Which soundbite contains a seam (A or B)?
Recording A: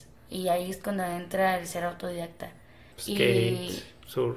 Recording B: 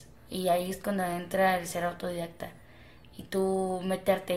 A